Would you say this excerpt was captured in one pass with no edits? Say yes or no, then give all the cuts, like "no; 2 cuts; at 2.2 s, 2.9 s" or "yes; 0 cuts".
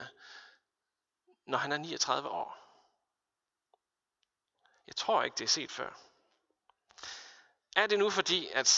yes; 0 cuts